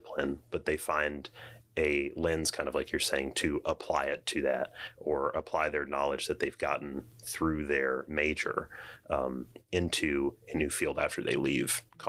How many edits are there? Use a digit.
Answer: 0